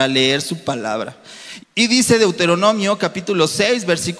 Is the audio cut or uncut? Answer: cut